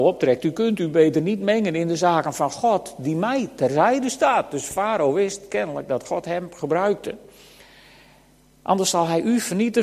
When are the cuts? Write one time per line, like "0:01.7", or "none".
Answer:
none